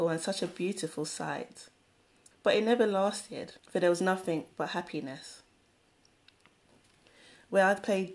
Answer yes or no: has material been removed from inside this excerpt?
yes